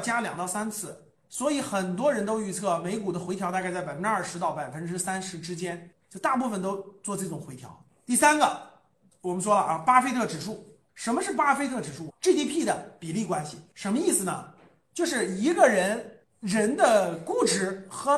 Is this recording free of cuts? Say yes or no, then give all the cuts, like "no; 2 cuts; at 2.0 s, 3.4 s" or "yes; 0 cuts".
no; 1 cut; at 12.1 s